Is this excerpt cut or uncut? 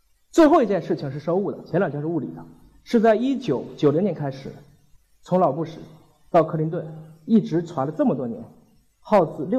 uncut